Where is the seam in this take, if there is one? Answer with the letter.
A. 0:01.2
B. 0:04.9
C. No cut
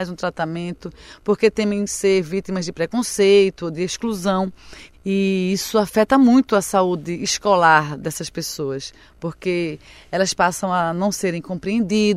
B